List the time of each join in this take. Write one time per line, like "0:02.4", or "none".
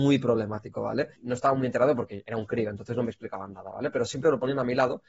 0:01.2

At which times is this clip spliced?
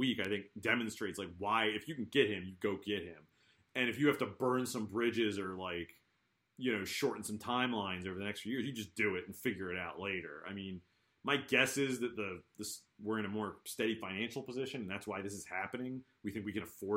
none

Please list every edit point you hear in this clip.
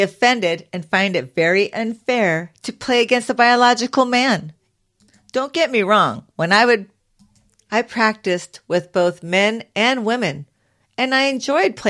none

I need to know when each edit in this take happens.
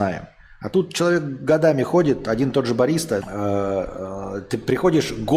0:03.2

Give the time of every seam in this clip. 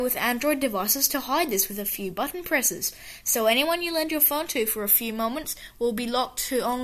none

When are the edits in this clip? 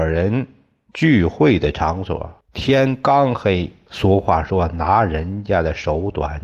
0:02.4
0:03.9

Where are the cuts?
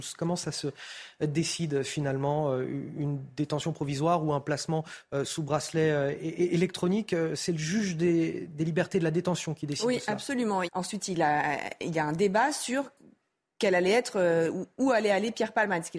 0:10.7

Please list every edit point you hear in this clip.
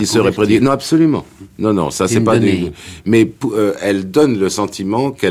none

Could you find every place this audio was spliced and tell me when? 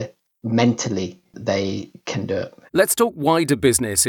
0:02.7

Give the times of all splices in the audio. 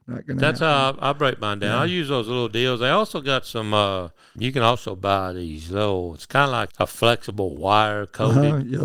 0:04.4
0:06.7

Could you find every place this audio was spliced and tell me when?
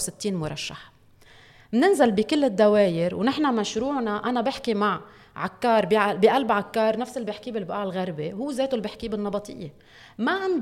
none

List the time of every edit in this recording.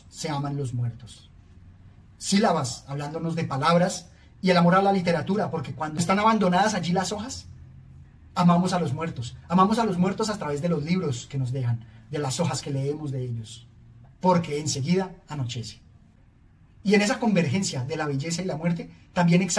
0:14.0

